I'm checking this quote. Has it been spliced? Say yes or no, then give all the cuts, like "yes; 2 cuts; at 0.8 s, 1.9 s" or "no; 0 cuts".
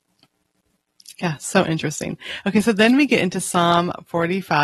no; 0 cuts